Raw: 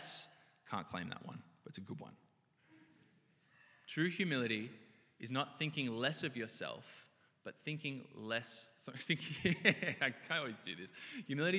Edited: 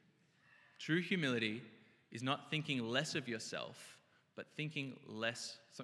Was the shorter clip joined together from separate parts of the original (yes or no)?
no